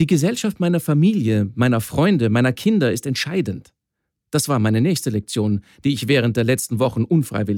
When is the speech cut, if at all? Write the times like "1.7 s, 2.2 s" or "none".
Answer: none